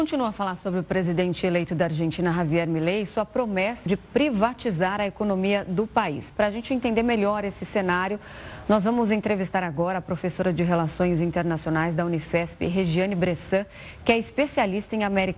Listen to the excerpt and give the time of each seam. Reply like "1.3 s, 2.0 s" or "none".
3.9 s